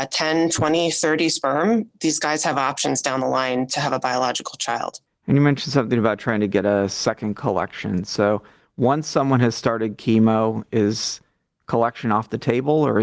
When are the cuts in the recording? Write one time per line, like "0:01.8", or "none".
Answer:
none